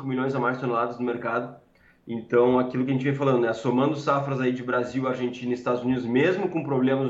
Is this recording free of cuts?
yes; 0 cuts

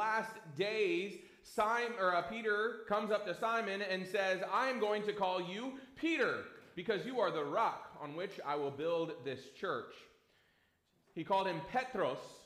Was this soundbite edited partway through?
no; 0 cuts

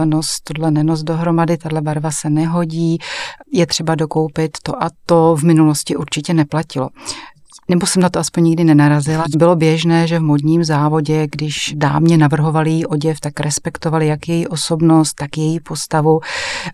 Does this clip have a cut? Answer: yes; 2 cuts; at 4.9 s, 9.3 s

